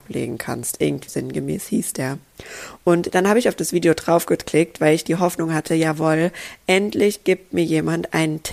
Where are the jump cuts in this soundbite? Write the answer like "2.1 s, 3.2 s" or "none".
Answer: 1.1 s